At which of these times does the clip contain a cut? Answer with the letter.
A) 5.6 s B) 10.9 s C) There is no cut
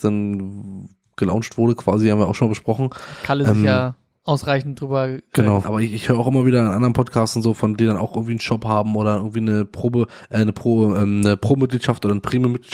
A